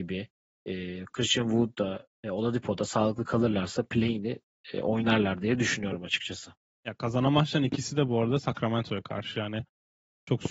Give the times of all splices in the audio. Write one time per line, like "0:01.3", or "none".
none